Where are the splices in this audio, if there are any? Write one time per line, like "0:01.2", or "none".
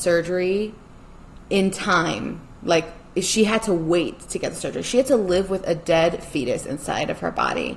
none